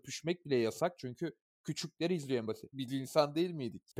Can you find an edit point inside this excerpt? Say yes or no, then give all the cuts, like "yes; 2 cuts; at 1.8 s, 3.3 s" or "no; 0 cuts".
yes; 1 cut; at 2.7 s